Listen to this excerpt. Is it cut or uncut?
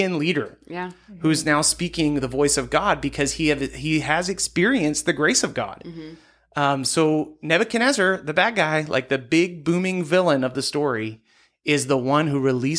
uncut